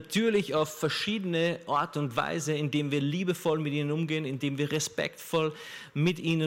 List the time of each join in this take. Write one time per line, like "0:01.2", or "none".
none

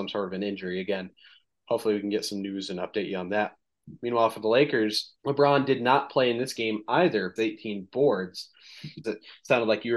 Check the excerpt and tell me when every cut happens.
0:05.2
0:07.4
0:09.0

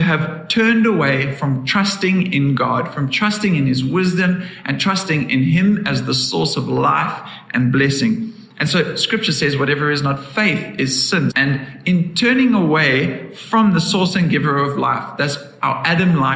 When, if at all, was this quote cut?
0:11.3

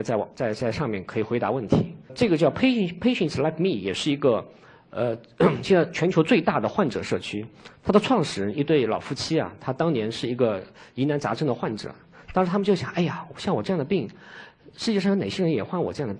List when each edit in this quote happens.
none

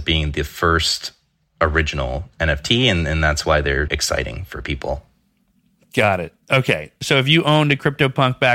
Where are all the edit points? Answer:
0:03.9

